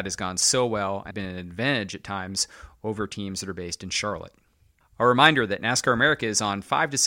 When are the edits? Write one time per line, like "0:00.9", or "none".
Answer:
0:01.1